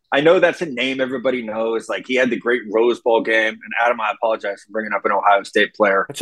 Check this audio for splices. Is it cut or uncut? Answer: uncut